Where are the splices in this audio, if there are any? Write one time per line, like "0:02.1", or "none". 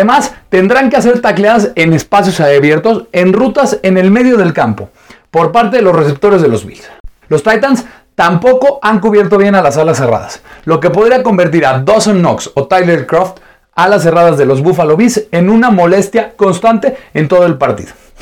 0:07.2
0:16.4